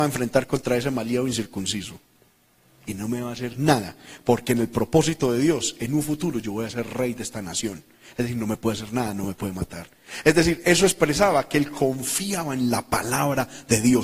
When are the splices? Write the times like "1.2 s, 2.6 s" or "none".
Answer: none

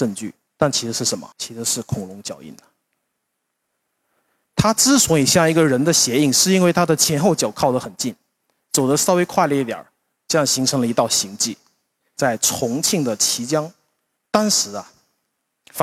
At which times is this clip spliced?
1.3 s

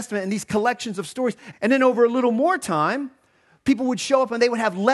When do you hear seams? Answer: 1.5 s

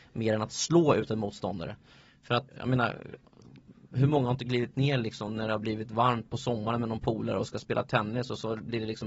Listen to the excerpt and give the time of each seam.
2.5 s

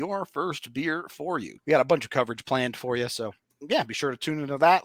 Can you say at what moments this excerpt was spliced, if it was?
1.6 s

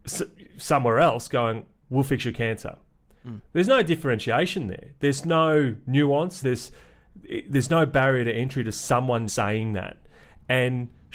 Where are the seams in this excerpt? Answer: 6.4 s, 9.3 s

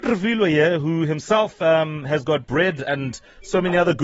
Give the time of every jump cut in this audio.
none

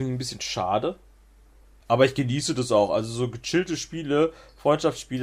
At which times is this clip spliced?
1.8 s

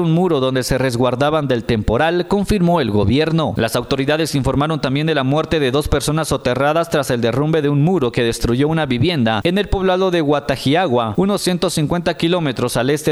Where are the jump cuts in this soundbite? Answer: 3.6 s

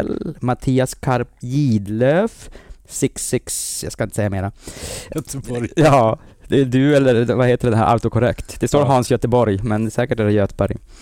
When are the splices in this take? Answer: 5.1 s

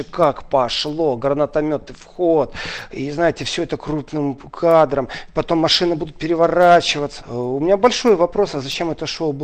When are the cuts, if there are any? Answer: 7.2 s

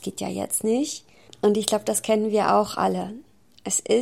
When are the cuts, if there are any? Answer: 1.3 s

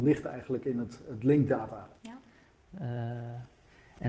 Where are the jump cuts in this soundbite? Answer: 2.0 s

